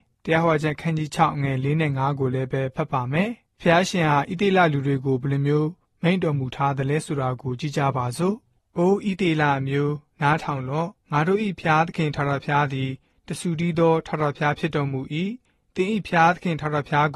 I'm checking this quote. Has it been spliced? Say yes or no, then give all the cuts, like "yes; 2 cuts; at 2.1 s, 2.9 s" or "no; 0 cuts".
no; 0 cuts